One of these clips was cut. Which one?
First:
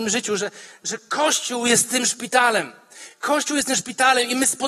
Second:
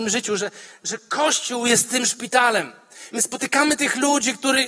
second; 1 cut; at 3.1 s

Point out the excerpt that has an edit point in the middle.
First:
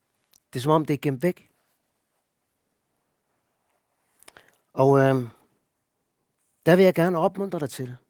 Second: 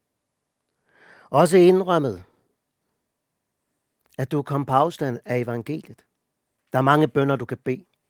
second; 1 cut; at 6.6 s

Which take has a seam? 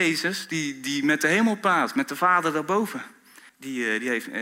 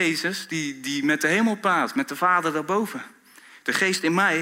first; 1 cut; at 3.5 s

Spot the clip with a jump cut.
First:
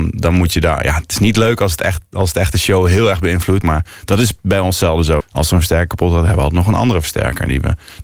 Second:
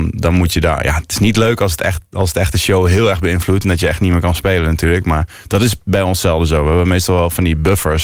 first; 2 cuts; at 3.6 s, 5.2 s

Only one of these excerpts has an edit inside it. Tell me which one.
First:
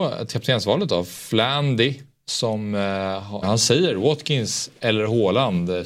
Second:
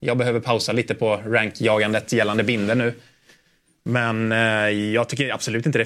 first; 1 cut; at 3.4 s

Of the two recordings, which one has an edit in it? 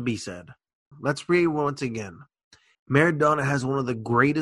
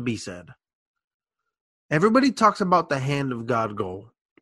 first; 2 cuts; at 0.9 s, 2.7 s

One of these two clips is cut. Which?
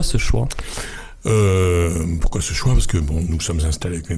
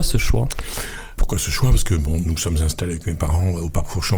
second; 1 cut; at 1.2 s

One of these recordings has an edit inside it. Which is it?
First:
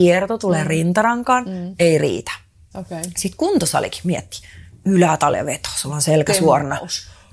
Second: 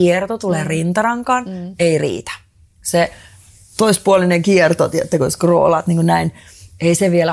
first; 1 cut; at 2.7 s

